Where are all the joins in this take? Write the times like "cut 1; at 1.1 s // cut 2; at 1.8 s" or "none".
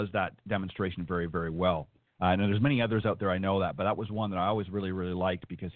cut 1; at 2.1 s